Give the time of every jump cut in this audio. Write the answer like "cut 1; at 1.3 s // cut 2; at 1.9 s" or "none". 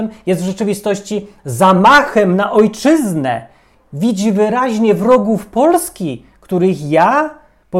none